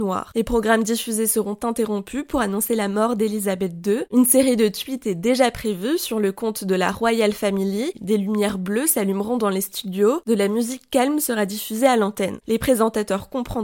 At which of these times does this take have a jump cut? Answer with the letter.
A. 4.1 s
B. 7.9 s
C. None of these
B